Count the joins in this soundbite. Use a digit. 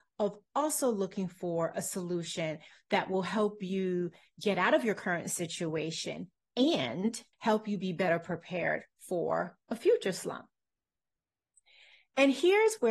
1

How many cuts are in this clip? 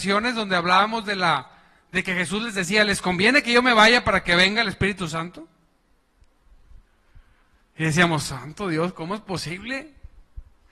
0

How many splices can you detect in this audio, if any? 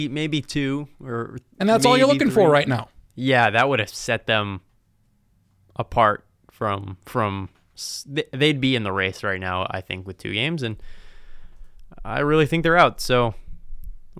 0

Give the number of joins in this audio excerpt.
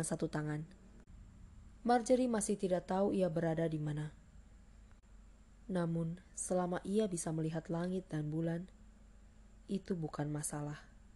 1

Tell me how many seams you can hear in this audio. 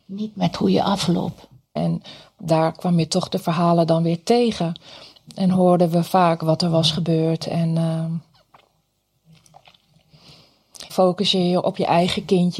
2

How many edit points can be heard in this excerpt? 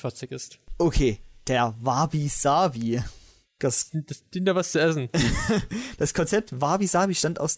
0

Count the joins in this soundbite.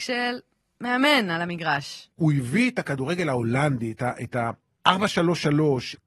1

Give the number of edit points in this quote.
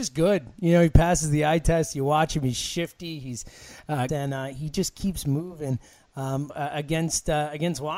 2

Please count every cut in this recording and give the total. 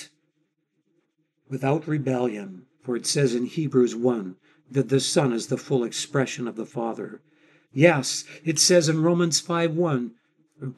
2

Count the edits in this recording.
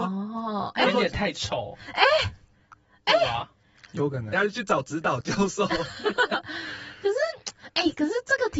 1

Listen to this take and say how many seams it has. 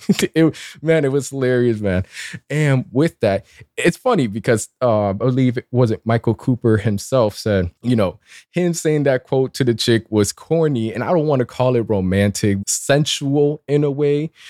3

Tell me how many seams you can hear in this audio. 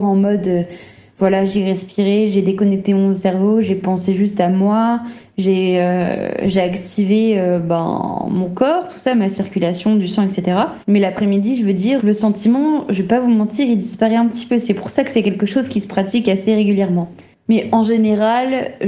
1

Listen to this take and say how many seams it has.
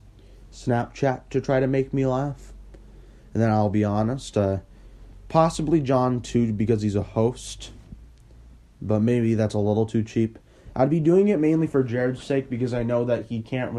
0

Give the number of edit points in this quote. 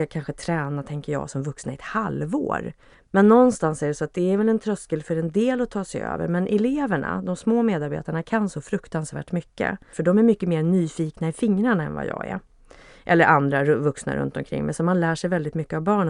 2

